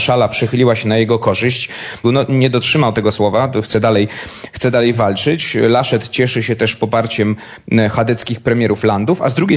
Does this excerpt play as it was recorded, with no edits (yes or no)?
no